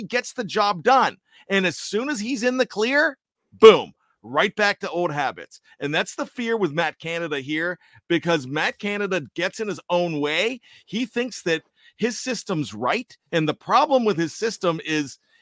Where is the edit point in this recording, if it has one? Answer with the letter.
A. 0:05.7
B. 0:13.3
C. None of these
B